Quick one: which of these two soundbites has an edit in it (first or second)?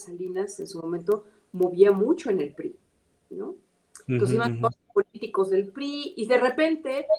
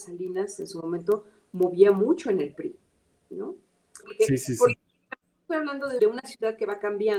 second